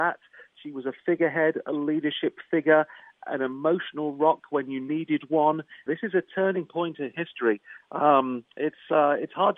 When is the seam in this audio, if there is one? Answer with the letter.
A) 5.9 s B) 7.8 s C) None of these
A